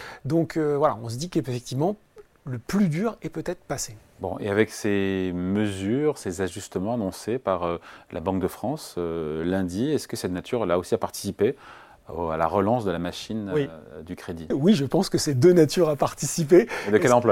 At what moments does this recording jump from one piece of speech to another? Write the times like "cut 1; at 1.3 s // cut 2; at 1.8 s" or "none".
cut 1; at 14.5 s